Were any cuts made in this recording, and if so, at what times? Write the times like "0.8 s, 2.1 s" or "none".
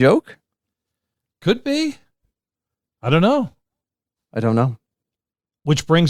none